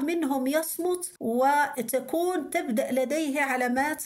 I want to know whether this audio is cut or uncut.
cut